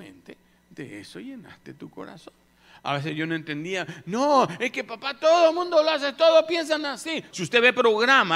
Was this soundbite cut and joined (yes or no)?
yes